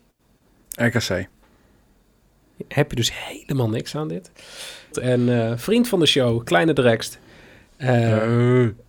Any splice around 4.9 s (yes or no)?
yes